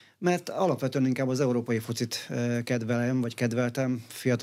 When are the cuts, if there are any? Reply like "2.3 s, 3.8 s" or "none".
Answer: none